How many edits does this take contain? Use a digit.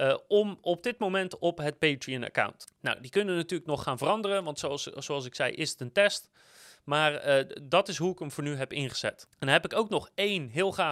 0